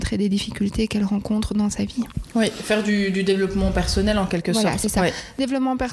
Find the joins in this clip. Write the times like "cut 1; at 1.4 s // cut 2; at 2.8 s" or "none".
none